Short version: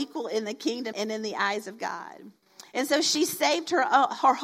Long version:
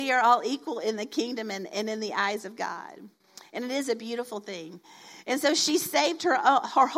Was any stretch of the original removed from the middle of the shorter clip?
yes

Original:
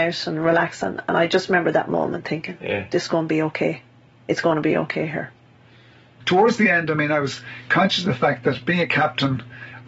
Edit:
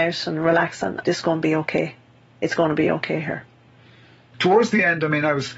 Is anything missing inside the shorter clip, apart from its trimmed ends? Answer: yes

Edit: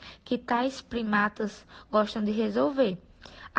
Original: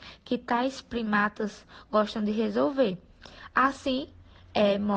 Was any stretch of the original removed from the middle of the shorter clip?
no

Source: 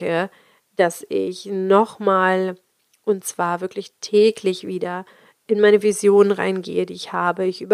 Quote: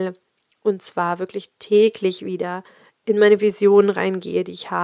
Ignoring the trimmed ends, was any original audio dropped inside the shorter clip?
no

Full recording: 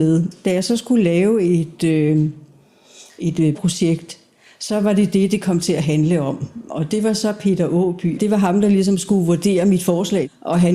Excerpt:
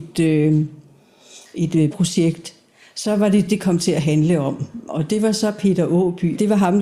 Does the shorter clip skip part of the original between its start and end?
yes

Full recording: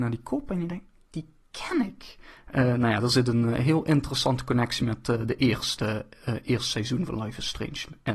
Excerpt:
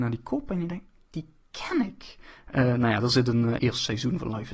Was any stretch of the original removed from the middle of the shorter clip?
yes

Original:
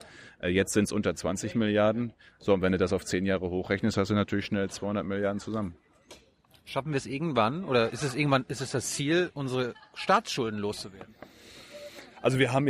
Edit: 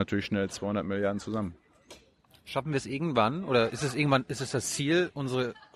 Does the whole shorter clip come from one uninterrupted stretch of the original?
yes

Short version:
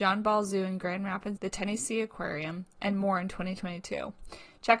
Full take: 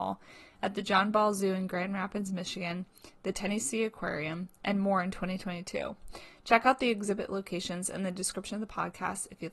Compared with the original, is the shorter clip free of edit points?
no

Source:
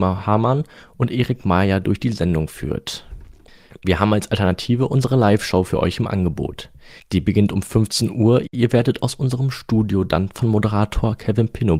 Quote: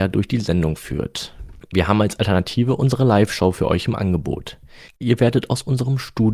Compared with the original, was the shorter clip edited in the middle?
yes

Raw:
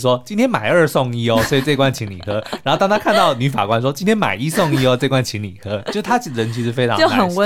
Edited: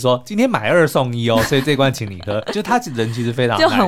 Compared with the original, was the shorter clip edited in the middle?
yes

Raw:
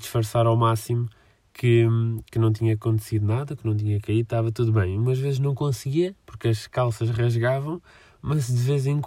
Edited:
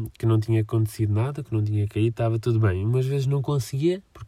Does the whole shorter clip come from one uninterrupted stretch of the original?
yes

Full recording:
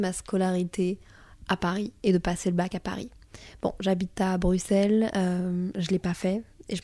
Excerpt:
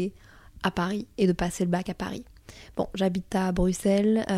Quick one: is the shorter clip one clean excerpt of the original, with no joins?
yes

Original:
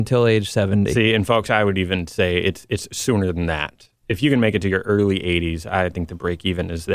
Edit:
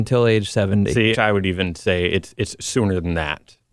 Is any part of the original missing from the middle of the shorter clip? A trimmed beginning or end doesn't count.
yes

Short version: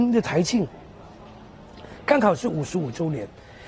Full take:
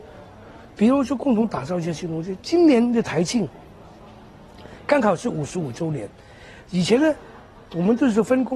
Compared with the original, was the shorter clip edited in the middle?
no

